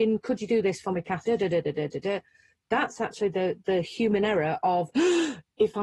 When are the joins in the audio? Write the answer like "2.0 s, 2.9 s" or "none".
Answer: 1.2 s